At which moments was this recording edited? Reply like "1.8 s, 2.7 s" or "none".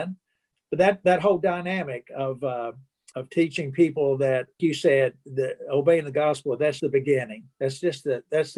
4.6 s, 6.8 s